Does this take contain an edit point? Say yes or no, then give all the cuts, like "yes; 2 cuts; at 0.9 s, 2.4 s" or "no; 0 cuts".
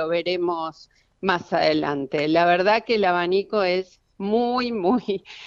no; 0 cuts